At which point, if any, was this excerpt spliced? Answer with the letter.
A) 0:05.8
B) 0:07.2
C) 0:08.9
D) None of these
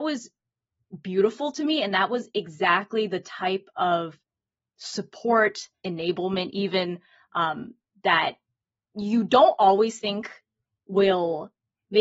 A